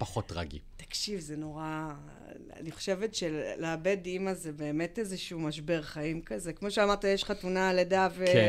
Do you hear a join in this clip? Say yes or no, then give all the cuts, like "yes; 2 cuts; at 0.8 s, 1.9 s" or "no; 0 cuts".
no; 0 cuts